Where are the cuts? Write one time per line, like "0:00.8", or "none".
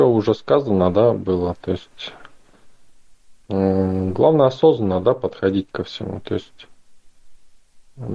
0:03.4